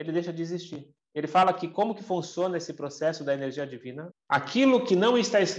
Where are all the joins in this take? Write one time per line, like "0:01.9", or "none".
0:01.0
0:04.1